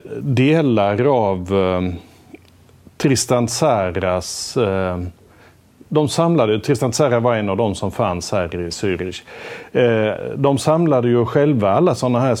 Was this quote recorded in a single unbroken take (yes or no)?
yes